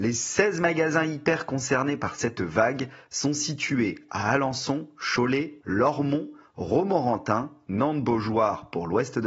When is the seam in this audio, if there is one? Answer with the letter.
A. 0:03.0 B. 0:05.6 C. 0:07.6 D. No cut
B